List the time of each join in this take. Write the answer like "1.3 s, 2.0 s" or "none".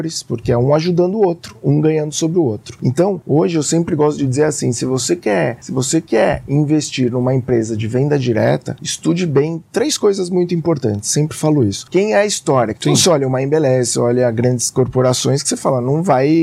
12.7 s